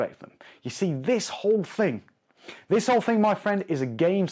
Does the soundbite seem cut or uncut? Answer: uncut